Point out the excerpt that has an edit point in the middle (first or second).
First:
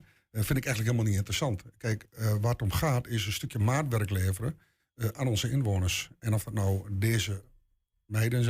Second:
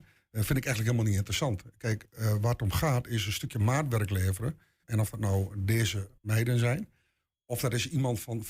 second